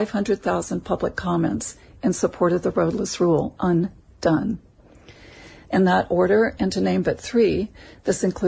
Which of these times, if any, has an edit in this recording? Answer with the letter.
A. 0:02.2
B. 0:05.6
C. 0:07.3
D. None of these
B